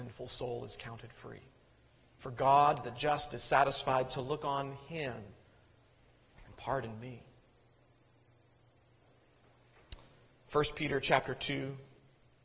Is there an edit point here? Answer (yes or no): no